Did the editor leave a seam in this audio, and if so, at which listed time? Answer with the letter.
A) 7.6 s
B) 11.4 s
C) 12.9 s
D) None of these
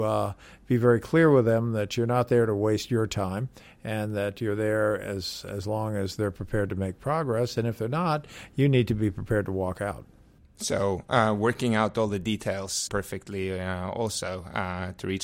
C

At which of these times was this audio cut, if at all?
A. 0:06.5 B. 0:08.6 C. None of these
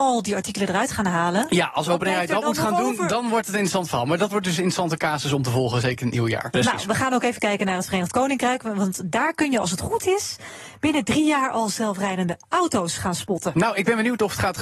A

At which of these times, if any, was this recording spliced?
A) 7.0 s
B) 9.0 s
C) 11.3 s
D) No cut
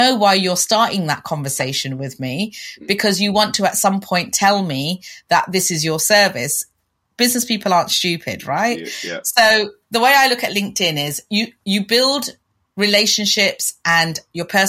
D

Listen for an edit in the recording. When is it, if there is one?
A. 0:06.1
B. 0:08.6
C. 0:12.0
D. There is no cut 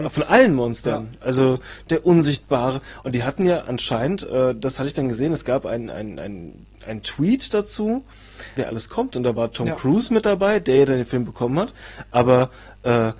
B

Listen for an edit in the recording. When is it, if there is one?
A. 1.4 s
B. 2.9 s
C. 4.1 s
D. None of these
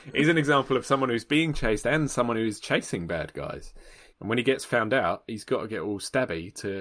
C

